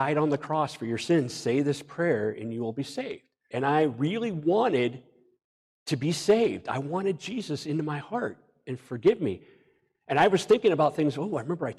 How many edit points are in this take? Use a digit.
1